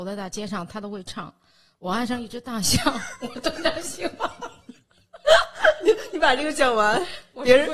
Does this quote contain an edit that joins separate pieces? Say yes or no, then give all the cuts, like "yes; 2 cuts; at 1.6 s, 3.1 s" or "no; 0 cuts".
no; 0 cuts